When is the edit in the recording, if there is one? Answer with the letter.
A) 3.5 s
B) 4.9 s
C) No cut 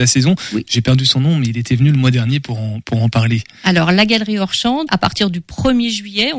B